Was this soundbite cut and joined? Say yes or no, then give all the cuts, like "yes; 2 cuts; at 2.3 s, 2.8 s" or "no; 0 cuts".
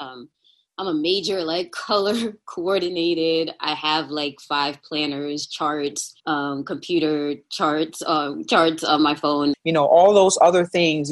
yes; 2 cuts; at 6.2 s, 9.5 s